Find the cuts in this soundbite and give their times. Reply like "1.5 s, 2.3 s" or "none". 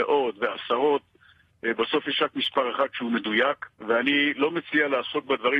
3.7 s